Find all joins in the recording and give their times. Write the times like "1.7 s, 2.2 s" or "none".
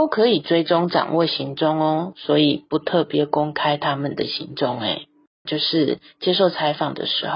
5.5 s